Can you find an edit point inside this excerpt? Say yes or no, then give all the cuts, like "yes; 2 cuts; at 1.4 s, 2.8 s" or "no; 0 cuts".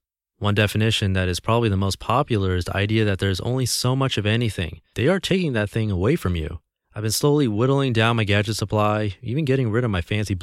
yes; 2 cuts; at 4.9 s, 6.8 s